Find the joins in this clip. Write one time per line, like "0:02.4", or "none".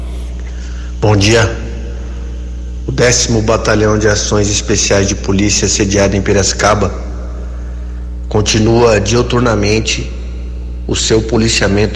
none